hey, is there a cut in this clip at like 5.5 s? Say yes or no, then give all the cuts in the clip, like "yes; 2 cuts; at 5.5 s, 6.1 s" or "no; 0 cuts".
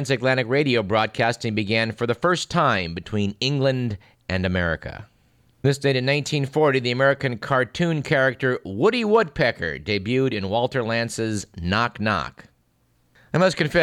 no; 0 cuts